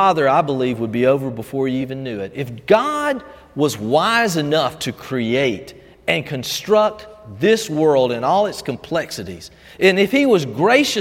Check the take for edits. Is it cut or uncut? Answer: uncut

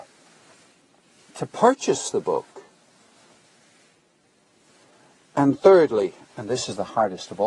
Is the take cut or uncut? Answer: uncut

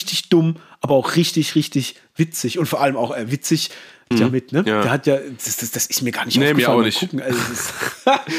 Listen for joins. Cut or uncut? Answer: cut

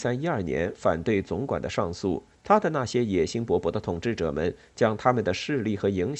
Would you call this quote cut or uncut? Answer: cut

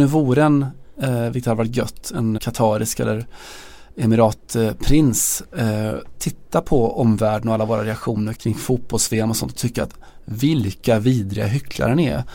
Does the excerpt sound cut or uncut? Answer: cut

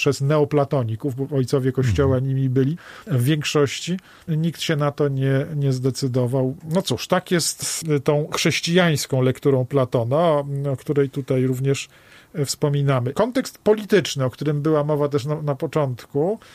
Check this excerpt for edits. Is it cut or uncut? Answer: uncut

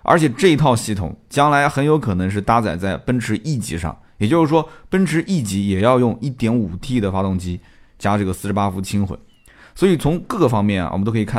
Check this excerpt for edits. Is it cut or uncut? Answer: uncut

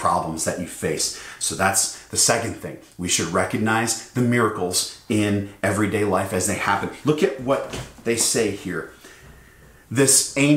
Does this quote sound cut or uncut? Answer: cut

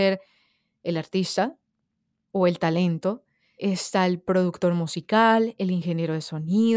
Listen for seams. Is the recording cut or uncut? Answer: cut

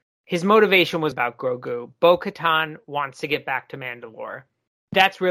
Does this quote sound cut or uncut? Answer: cut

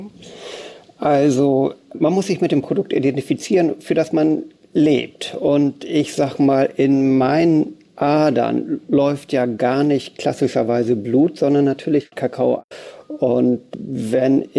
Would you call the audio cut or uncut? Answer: uncut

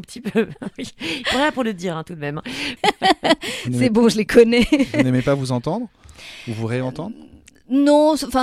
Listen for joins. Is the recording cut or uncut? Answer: cut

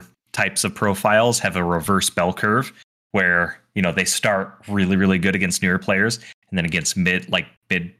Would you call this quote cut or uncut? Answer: uncut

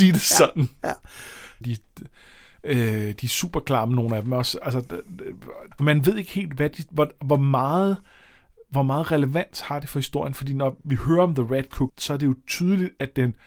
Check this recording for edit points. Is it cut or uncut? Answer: cut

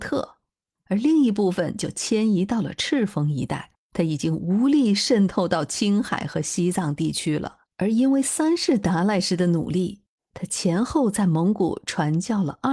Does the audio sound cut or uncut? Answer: cut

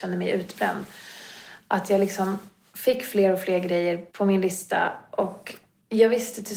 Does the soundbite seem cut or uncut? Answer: cut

